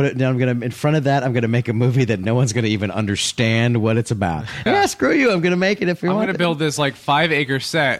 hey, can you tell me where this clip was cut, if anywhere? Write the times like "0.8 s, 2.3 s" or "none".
4.7 s